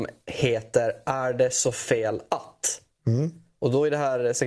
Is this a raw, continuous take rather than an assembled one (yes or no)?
yes